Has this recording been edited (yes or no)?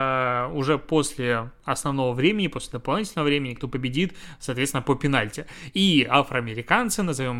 yes